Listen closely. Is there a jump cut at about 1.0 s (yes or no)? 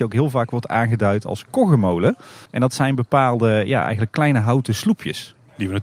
no